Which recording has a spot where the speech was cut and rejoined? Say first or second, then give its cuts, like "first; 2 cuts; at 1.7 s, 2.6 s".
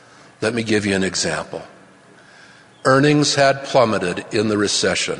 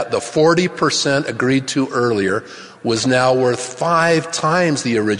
first; 1 cut; at 2.7 s